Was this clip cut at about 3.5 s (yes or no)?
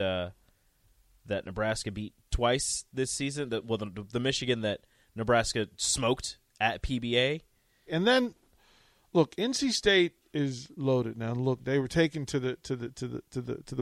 no